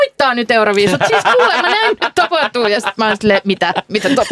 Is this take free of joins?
yes; 0 cuts

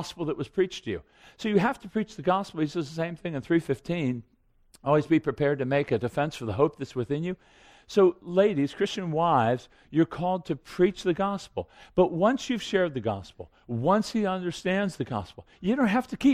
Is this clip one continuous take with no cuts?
yes; 0 cuts

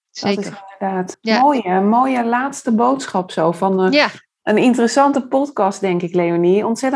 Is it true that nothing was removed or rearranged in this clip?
no; 1 cut; at 1.1 s

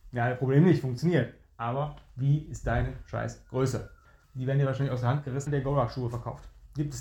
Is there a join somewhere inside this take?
yes; 2 cuts; at 4.2 s, 5.5 s

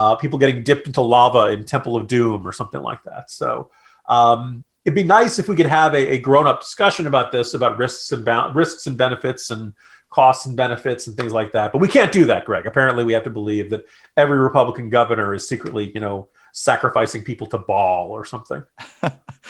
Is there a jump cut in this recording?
no; 0 cuts

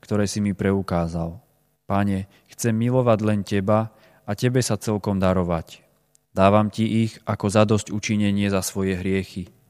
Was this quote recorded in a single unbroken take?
no; 2 cuts; at 1.8 s, 6.2 s

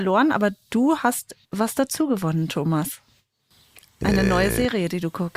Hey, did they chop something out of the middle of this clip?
yes; 1 cut; at 1.4 s

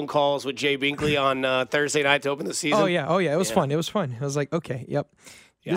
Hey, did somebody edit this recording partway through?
no; 0 cuts

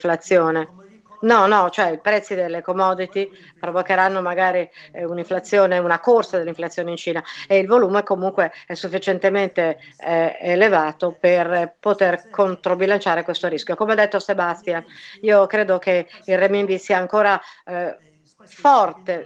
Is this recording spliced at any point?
no; 0 cuts

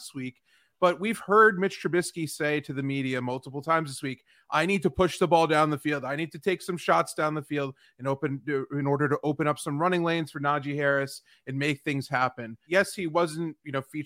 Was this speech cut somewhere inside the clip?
yes; 1 cut; at 12.6 s

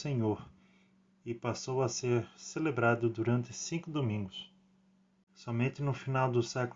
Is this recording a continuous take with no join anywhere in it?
no; 1 cut; at 5.3 s

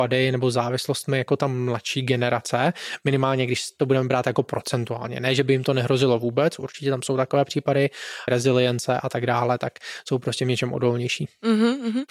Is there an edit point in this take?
yes; 1 cut; at 8.3 s

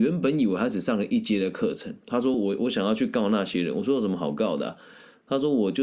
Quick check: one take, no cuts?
yes; 0 cuts

